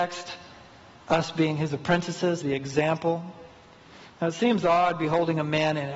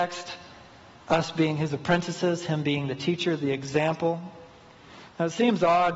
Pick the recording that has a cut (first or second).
first